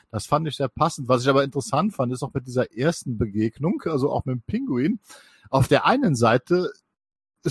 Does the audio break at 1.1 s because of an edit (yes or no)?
no